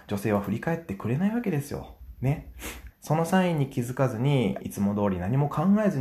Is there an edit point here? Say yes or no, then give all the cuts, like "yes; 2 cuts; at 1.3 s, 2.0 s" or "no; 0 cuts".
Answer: yes; 2 cuts; at 2.9 s, 4.6 s